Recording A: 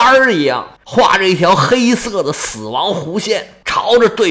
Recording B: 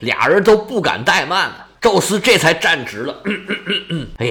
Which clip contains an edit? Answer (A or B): B